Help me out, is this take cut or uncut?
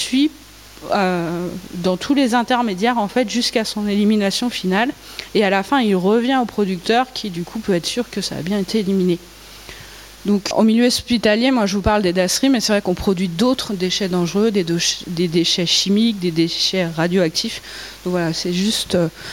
cut